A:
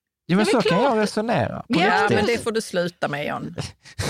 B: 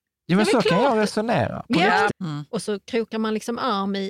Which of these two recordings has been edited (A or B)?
B